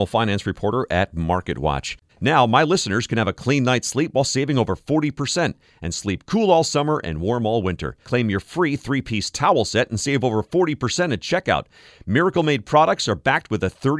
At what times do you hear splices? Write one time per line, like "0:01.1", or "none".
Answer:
0:02.1
0:08.0